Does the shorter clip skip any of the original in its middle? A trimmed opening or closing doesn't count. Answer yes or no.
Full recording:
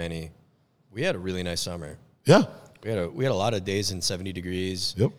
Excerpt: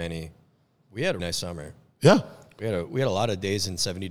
yes